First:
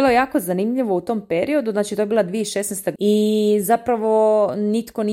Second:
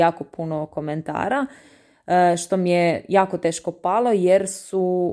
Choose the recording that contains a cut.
first; 1 cut; at 3.0 s

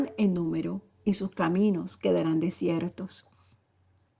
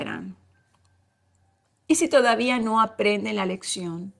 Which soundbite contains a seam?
second; 1 cut; at 1.7 s

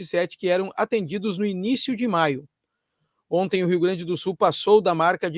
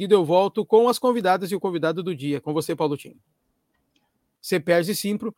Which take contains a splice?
second; 1 cut; at 4.3 s

